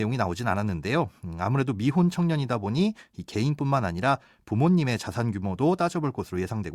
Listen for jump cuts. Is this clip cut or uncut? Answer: uncut